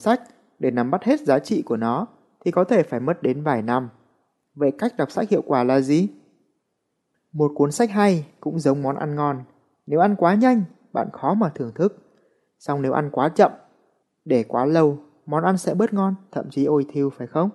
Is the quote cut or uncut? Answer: uncut